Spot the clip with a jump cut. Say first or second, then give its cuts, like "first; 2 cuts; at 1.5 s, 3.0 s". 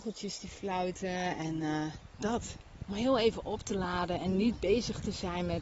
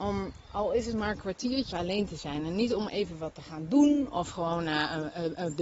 second; 1 cut; at 1.7 s